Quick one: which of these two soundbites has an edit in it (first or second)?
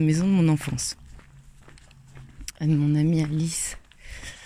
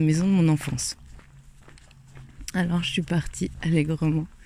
first